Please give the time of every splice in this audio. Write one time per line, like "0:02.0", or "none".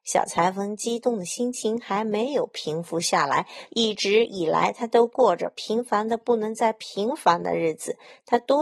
0:03.7